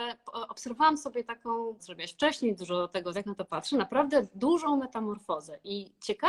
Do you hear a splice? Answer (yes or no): yes